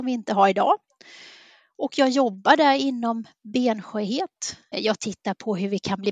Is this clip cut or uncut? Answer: cut